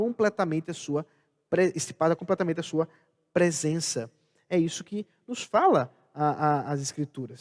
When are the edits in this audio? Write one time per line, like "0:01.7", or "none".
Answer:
none

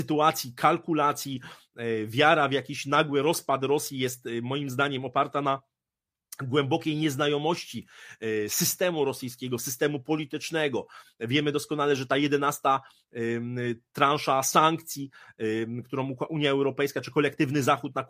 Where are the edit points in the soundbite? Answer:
none

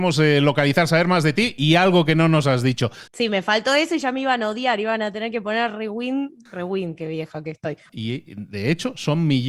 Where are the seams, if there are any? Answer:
0:03.1
0:07.9

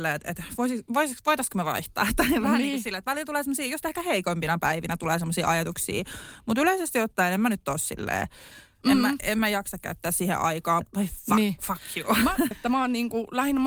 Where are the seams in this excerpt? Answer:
0:10.8
0:12.5

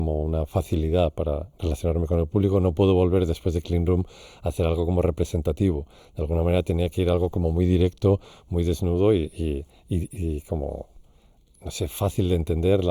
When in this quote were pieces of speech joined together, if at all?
none

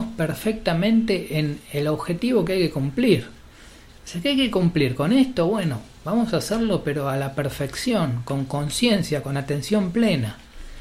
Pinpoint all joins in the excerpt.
none

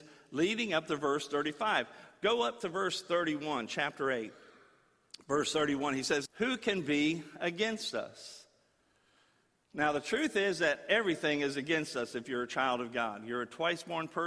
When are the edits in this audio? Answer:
0:06.3

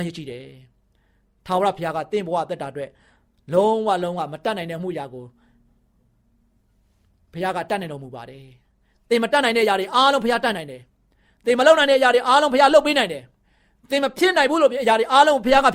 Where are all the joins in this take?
none

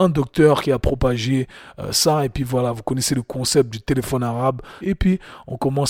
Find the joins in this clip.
0:04.8

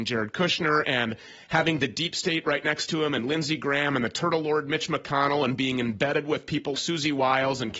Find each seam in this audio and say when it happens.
0:06.7

